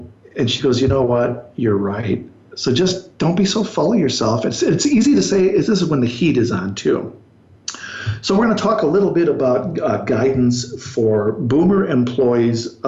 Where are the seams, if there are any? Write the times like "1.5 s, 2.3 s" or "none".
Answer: none

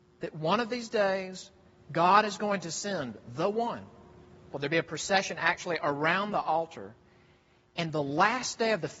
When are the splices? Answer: 4.5 s

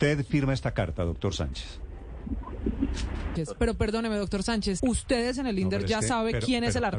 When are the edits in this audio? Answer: 3.4 s, 4.8 s

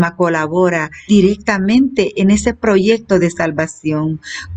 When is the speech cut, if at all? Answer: 1.1 s

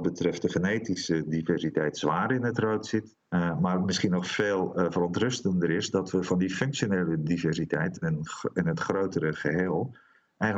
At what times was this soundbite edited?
3.2 s, 8.0 s

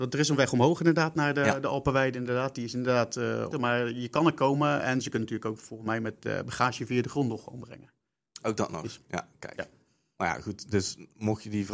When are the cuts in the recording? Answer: 3.5 s

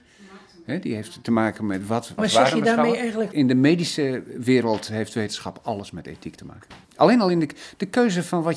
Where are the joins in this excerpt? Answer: 2.2 s, 3.3 s, 6.8 s

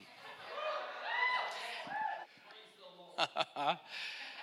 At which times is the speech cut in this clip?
2.2 s

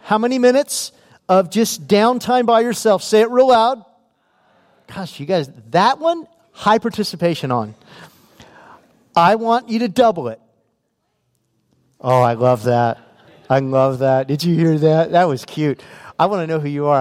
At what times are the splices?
none

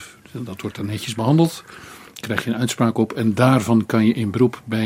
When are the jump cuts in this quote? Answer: none

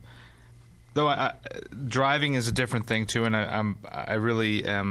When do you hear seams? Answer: none

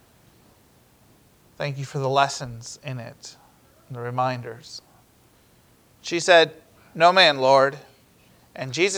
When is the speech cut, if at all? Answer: 5.9 s

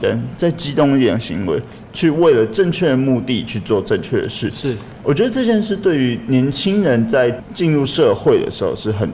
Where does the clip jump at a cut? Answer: none

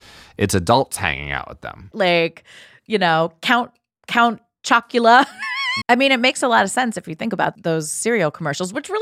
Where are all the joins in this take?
1.9 s, 5.8 s, 7.5 s

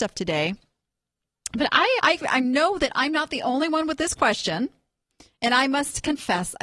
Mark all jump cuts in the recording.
2.0 s

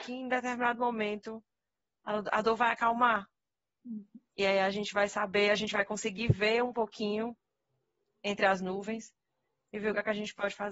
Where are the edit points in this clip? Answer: none

